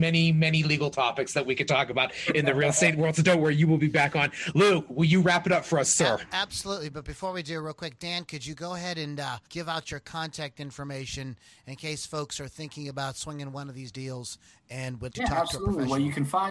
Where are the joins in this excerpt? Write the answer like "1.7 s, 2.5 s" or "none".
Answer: 9.5 s, 15.1 s